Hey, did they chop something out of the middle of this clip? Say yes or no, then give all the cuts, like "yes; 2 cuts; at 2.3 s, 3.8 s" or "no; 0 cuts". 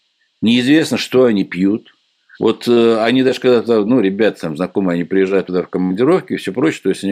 yes; 1 cut; at 2.3 s